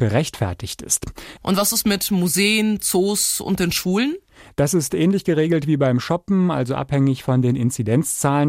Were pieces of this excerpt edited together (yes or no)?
yes